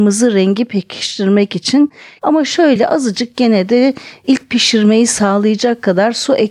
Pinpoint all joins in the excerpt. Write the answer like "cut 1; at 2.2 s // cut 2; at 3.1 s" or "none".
cut 1; at 2.2 s